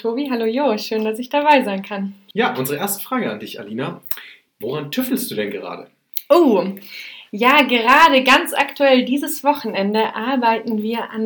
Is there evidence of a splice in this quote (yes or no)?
no